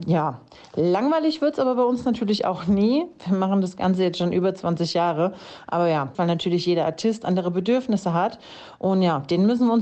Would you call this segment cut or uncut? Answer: cut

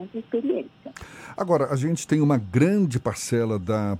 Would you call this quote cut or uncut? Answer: uncut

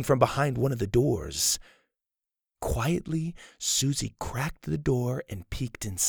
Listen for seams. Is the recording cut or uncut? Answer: uncut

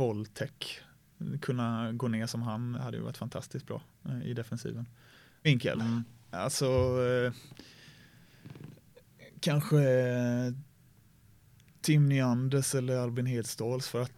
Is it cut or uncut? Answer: cut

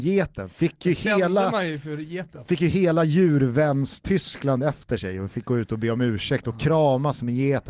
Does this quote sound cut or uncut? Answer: uncut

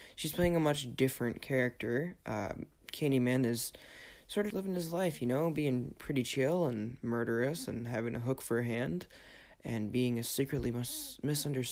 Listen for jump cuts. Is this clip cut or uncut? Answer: cut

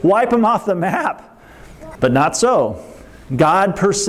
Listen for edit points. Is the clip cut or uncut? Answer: cut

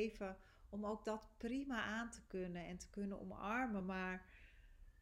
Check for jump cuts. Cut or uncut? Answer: uncut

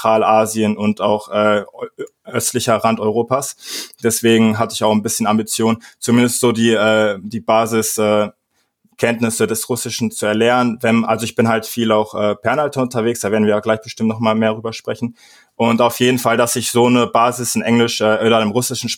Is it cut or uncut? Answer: uncut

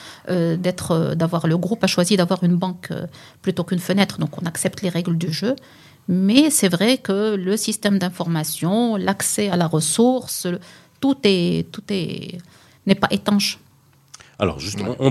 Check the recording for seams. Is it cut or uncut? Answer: uncut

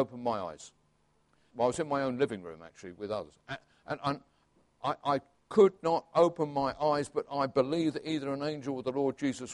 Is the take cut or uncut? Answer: cut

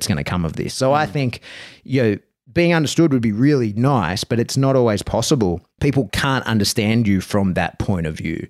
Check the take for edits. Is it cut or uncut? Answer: cut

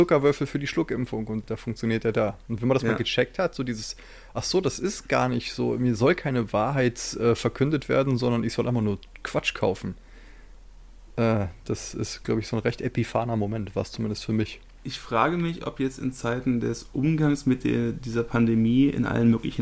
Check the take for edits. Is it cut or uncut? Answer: cut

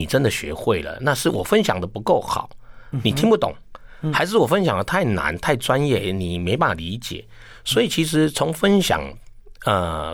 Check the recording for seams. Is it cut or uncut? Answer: uncut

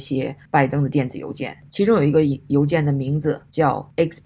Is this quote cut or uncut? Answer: uncut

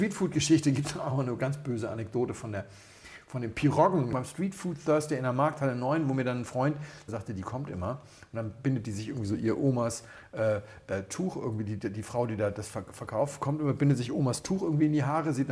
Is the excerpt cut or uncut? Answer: cut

